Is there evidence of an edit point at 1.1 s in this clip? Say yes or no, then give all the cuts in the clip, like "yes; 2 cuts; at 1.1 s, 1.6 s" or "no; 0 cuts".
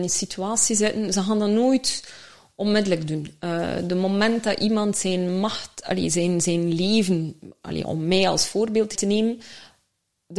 no; 2 cuts; at 7.9 s, 8.9 s